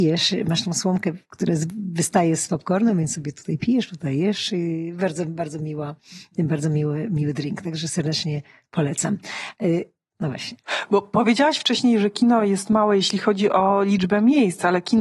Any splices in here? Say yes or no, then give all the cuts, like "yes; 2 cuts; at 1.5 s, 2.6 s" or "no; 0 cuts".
no; 0 cuts